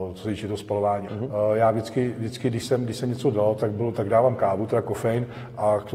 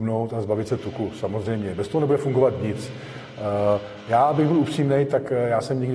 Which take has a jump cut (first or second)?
first